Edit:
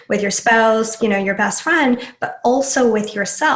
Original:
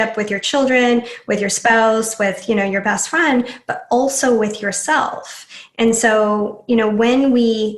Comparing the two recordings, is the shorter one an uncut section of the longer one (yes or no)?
no